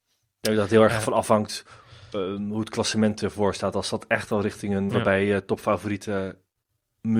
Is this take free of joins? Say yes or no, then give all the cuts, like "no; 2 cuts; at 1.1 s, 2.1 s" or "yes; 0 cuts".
no; 1 cut; at 4.9 s